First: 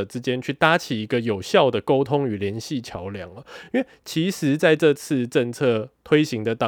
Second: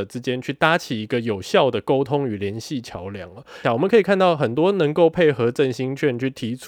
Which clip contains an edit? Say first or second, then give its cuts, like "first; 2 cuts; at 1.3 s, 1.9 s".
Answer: second; 1 cut; at 3.6 s